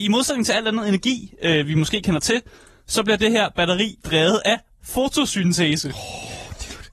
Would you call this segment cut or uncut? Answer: uncut